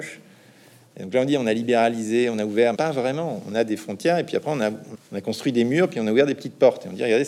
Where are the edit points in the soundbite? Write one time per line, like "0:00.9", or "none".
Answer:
0:02.7
0:04.9